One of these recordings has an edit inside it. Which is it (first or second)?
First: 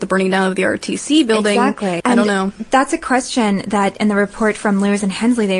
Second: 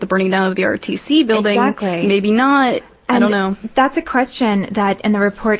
first